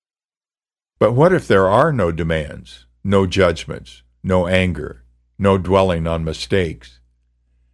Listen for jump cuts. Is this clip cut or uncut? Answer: uncut